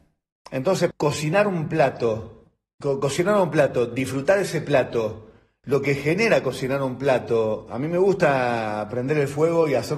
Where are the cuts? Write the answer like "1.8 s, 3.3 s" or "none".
0.9 s, 2.8 s

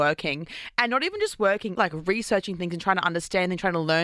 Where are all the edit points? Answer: 1.8 s

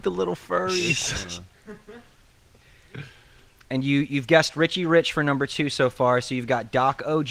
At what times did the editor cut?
none

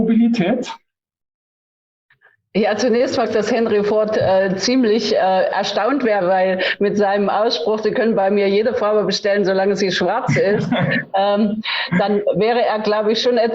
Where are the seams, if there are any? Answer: 3.3 s, 6.2 s

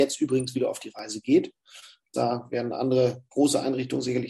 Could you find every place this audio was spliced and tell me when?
2.1 s

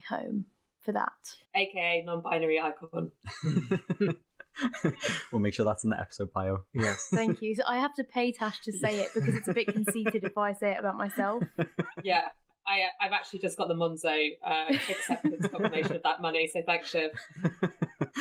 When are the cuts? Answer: 1.4 s

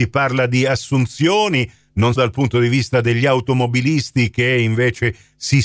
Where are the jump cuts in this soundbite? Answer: 2.2 s

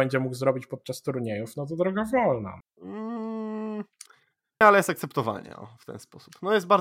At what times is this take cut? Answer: 2.6 s, 4.6 s

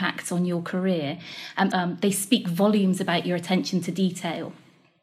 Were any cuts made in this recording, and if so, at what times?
1.7 s

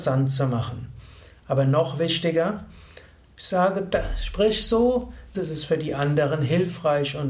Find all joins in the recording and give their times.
5.3 s

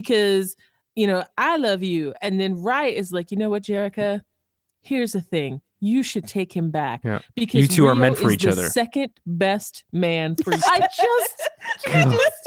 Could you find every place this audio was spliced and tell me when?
10.6 s

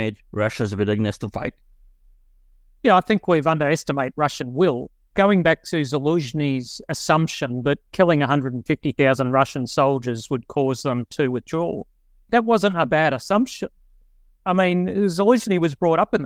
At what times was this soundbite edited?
none

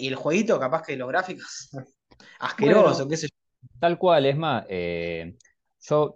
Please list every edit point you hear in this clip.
none

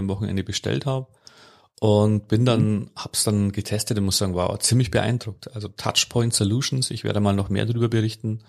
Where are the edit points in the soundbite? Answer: none

